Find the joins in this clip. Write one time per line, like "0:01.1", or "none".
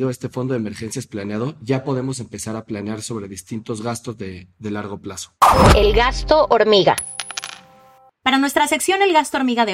none